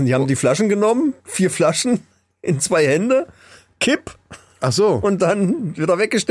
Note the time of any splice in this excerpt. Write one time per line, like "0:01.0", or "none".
none